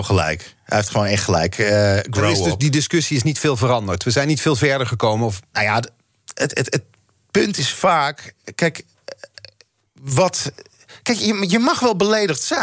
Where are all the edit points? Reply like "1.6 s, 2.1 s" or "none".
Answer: none